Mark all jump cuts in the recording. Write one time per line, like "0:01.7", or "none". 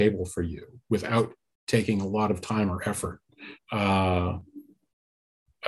0:03.5